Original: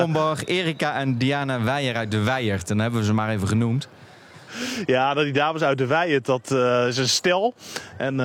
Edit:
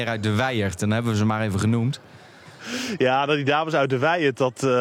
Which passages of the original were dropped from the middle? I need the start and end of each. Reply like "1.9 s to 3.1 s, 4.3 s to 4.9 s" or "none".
none